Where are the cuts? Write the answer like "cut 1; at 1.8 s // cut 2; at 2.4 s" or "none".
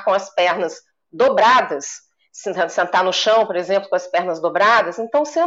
none